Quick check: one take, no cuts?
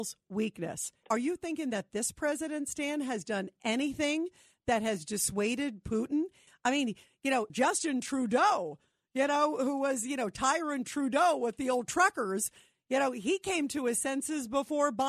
no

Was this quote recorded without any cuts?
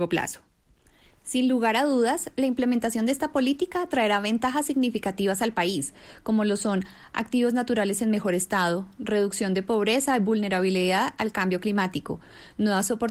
yes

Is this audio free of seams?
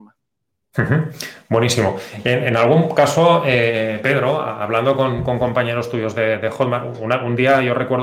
yes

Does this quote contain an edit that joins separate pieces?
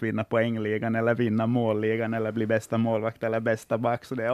no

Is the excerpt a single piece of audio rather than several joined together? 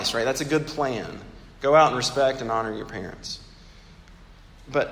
yes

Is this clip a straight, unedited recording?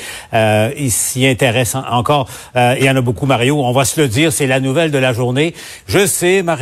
yes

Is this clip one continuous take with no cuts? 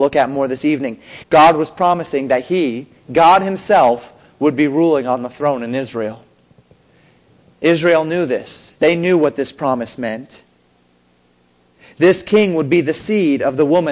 no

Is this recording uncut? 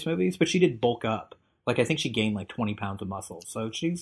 yes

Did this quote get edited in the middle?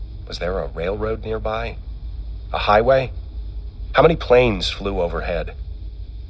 no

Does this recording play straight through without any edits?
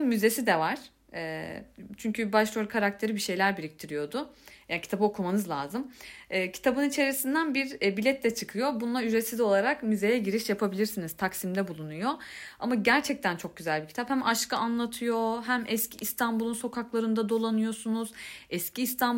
yes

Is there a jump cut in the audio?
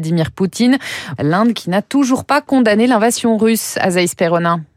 yes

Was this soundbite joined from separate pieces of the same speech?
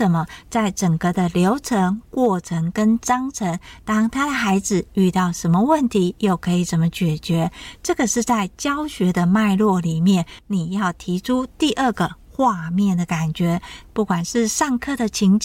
yes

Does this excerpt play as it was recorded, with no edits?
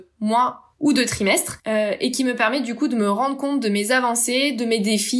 yes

